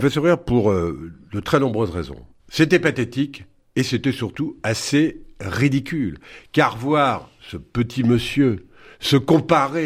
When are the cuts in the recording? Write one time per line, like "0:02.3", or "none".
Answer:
0:02.4